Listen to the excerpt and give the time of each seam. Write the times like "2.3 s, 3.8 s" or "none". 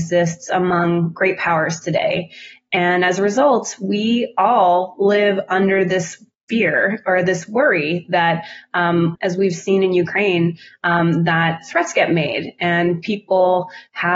9.1 s